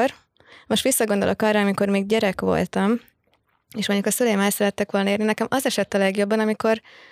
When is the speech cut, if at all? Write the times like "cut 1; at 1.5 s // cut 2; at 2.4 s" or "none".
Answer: none